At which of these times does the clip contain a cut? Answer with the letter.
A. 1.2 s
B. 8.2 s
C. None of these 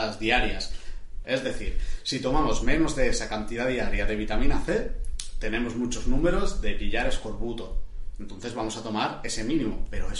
A